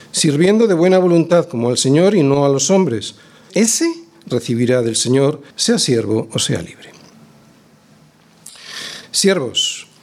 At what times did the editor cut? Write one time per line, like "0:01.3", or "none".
0:03.5
0:05.5
0:09.0